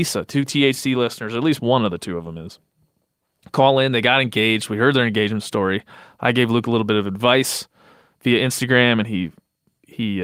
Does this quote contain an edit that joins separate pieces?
no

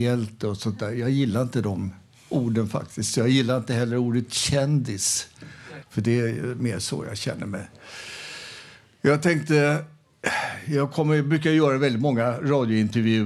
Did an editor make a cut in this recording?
yes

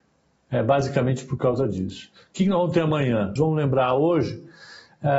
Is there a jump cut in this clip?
yes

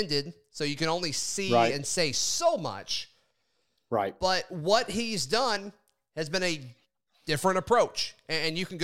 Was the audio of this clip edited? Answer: no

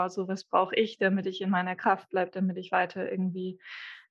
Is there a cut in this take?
no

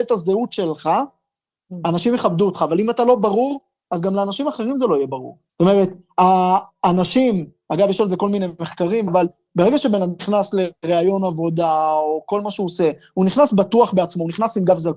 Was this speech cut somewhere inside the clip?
yes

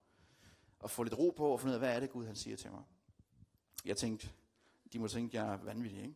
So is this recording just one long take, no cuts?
no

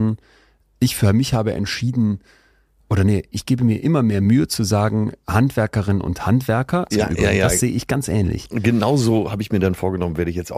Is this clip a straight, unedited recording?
no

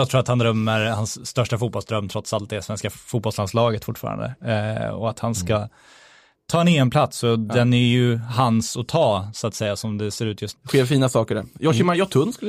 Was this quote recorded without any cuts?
no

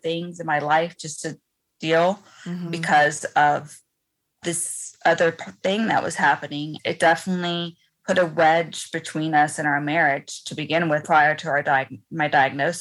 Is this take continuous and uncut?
no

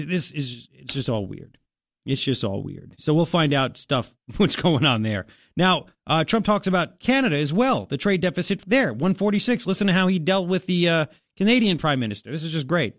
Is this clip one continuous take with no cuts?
yes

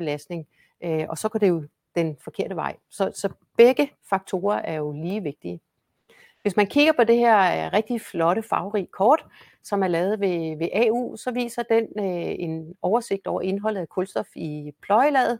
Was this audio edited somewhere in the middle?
no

